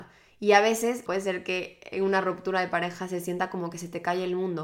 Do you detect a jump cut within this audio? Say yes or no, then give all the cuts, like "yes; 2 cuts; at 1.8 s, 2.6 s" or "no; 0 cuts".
yes; 1 cut; at 1.1 s